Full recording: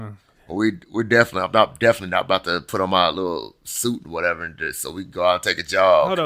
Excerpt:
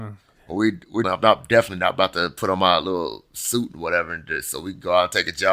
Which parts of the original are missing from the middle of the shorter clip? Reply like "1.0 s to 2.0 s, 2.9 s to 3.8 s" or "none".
1.0 s to 1.4 s